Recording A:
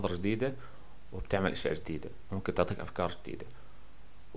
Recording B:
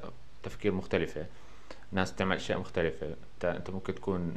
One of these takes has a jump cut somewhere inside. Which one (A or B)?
B